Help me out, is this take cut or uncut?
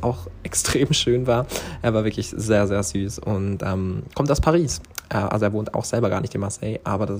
uncut